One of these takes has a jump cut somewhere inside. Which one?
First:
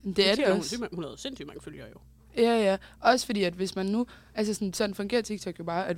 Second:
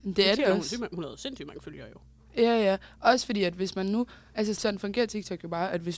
second; 1 cut; at 4.6 s

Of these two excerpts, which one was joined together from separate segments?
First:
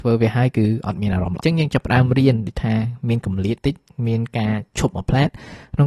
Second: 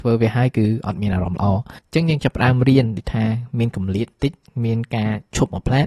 first; 2 cuts; at 1.4 s, 3.6 s

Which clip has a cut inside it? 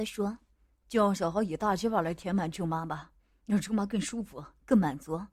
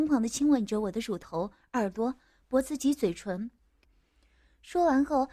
second; 1 cut; at 3.8 s

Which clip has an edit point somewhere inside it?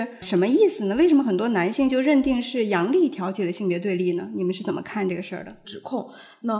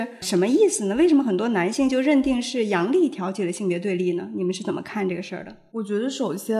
first; 1 cut; at 5.6 s

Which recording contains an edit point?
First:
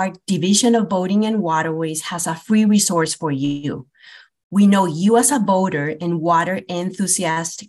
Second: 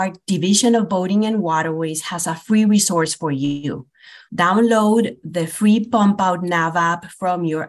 second; 1 cut; at 4.3 s

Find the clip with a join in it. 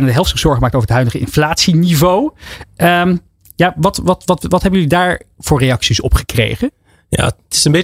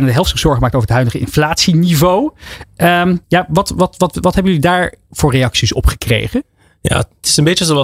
second; 1 cut; at 3.2 s

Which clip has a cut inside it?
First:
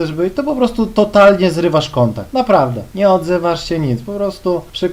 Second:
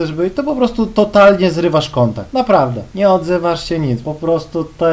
second; 1 cut; at 4.0 s

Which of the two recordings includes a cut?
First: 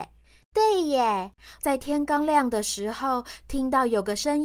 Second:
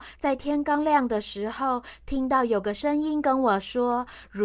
first; 1 cut; at 1.6 s

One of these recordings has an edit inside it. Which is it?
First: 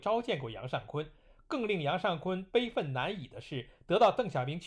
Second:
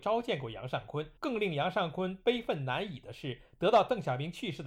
second; 1 cut; at 1.2 s

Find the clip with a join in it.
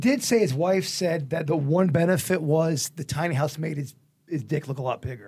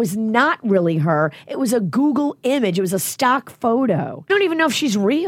second; 1 cut; at 4.3 s

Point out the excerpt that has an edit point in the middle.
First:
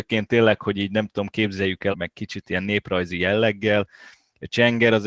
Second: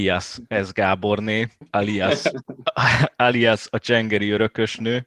first; 1 cut; at 1.9 s

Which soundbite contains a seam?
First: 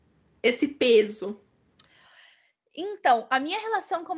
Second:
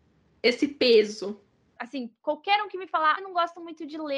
second; 2 cuts; at 1.8 s, 3.2 s

